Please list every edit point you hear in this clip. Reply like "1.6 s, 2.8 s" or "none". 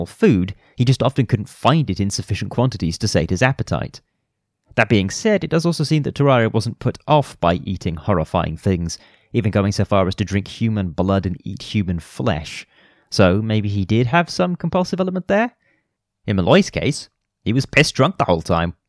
none